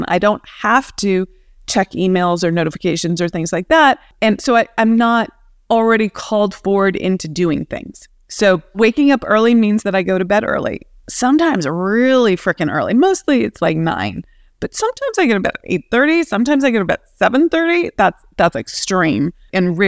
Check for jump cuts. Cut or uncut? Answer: uncut